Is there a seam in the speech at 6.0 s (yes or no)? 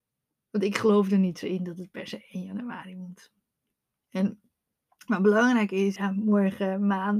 yes